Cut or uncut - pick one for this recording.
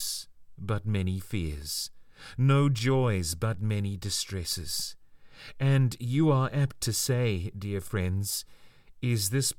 uncut